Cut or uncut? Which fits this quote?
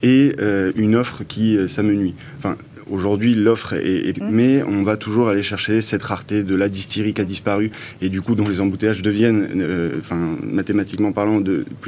cut